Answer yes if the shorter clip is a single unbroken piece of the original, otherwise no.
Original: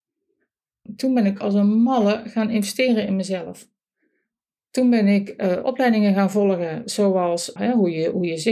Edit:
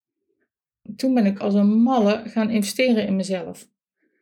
yes